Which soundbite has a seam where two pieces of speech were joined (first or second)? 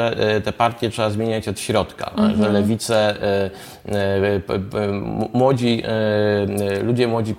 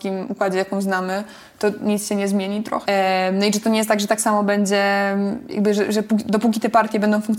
second